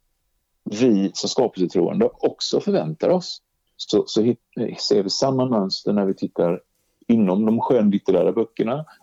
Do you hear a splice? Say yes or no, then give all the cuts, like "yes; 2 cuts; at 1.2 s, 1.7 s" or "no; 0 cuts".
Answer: yes; 1 cut; at 3.7 s